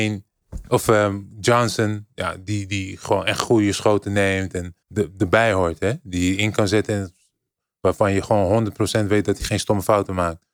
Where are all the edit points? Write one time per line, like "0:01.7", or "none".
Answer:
0:04.8